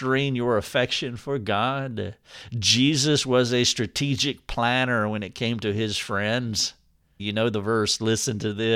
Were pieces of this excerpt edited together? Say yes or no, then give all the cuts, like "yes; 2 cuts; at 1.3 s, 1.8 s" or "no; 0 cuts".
yes; 1 cut; at 7.2 s